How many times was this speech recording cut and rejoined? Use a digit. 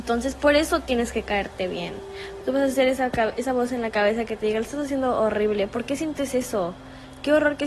1